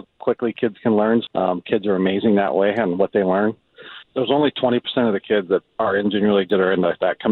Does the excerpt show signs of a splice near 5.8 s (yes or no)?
no